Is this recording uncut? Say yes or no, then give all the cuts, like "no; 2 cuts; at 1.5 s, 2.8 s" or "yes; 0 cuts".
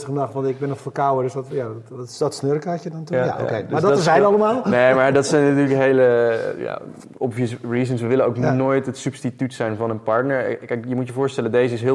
yes; 0 cuts